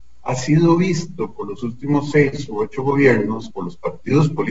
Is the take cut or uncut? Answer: uncut